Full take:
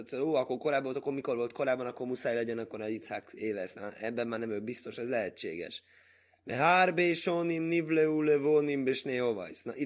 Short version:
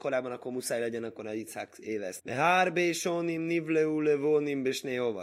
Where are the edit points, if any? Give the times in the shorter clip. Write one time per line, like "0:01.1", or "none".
0:02.2